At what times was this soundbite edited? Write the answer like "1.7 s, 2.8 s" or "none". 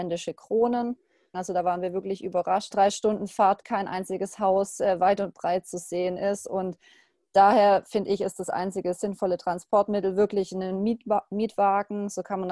1.3 s, 2.7 s